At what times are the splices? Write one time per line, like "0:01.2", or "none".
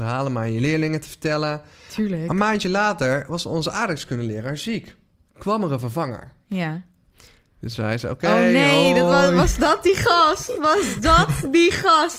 none